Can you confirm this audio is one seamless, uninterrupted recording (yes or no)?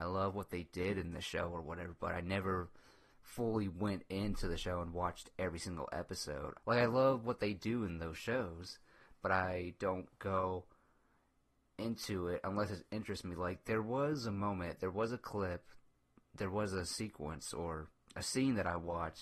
no